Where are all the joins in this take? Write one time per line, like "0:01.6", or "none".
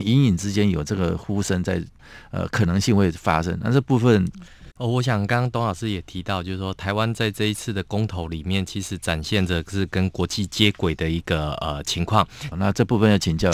0:04.7
0:12.5